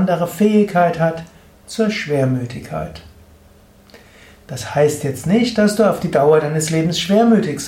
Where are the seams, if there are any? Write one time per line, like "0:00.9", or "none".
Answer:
none